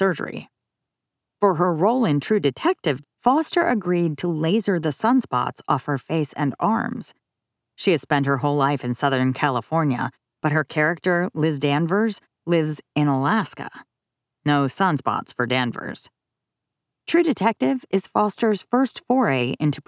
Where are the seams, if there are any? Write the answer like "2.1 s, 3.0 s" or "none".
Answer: 3.0 s